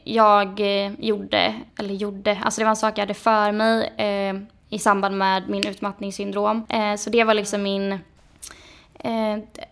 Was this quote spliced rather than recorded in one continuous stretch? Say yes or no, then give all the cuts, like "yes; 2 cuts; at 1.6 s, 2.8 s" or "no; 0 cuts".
yes; 2 cuts; at 1.7 s, 6.7 s